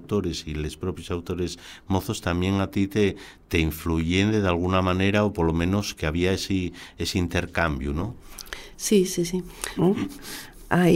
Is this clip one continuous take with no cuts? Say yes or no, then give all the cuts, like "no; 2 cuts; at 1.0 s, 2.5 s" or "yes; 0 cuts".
no; 1 cut; at 9.8 s